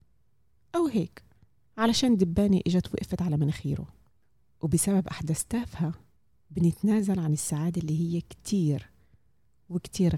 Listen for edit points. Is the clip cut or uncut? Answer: uncut